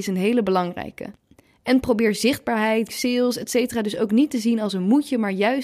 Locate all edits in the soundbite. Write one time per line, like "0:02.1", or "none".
0:02.9